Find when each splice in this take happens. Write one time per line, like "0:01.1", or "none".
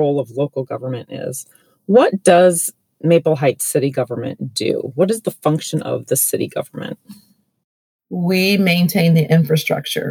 none